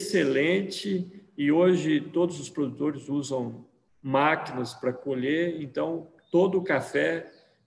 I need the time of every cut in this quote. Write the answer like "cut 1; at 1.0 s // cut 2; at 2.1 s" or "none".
none